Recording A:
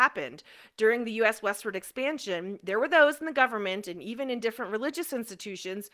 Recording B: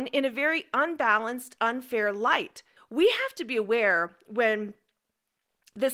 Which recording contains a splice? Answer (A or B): B